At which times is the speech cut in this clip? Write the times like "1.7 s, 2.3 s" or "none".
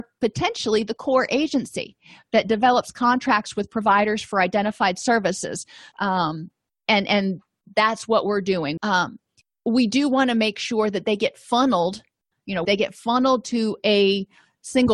5.9 s, 8.8 s, 12.6 s